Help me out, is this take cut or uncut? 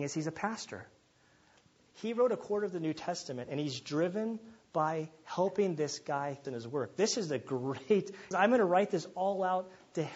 cut